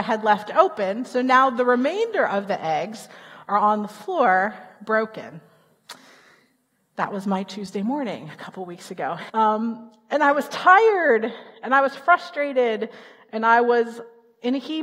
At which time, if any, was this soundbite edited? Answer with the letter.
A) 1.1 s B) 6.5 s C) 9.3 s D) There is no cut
C